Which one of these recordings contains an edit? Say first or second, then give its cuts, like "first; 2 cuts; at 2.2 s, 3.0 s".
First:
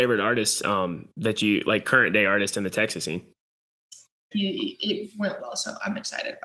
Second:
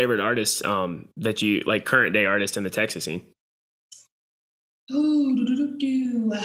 first; 2 cuts; at 4.3 s, 5.4 s